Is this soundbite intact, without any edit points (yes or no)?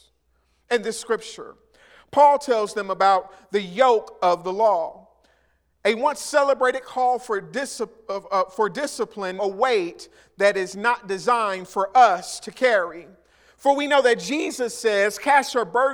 no